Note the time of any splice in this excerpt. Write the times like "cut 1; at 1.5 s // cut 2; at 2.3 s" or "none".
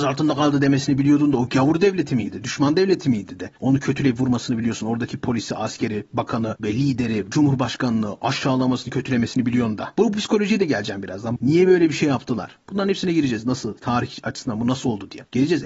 cut 1; at 10.0 s // cut 2; at 11.4 s